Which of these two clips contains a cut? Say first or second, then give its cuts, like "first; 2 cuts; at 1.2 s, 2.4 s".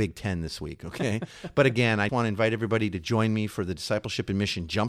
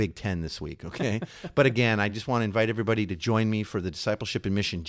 first; 1 cut; at 2.1 s